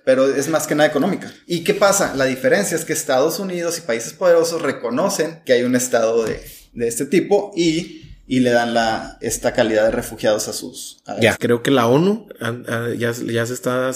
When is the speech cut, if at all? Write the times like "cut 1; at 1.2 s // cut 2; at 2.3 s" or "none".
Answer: cut 1; at 9.2 s // cut 2; at 11.3 s